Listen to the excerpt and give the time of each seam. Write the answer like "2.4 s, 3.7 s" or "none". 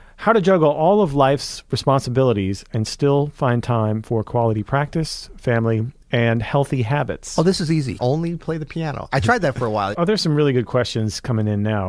8.0 s, 9.9 s